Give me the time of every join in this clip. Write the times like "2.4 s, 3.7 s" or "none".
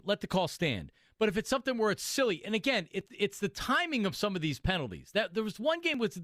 3.1 s